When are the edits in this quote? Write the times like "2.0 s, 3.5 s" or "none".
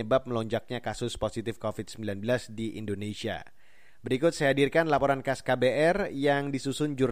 none